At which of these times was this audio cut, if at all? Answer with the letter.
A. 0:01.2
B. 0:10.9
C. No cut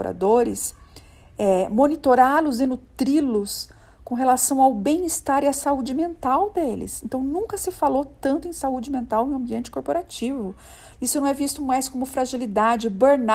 B